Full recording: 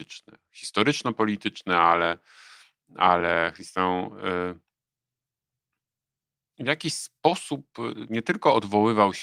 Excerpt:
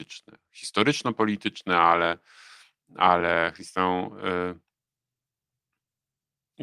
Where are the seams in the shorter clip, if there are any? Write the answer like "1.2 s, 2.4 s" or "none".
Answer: none